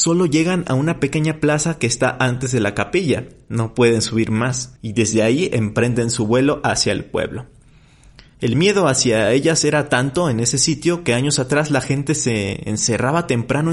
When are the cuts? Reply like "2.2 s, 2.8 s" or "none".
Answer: 4.8 s